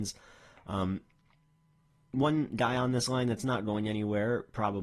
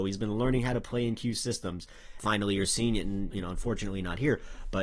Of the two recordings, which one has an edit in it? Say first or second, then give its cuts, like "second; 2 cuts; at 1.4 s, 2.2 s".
second; 2 cuts; at 2.2 s, 3.3 s